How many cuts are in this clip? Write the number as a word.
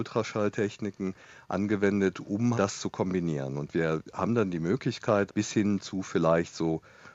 two